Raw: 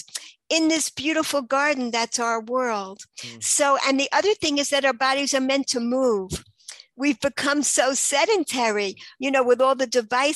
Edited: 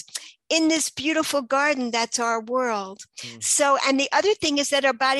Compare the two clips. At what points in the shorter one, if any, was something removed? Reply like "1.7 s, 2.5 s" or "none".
none